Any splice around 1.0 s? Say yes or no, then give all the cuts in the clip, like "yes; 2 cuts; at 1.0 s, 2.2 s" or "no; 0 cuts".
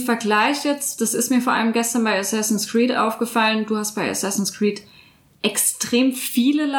no; 0 cuts